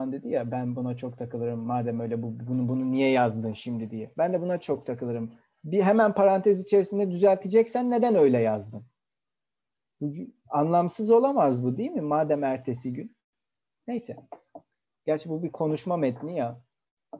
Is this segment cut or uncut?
uncut